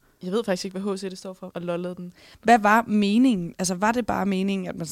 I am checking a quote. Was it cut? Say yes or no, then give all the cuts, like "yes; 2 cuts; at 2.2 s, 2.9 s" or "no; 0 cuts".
yes; 1 cut; at 1.5 s